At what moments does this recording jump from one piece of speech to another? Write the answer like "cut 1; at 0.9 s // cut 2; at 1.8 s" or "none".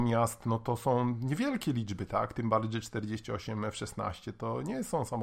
none